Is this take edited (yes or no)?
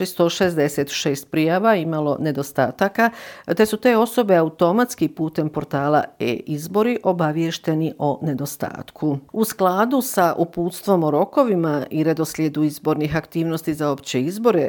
no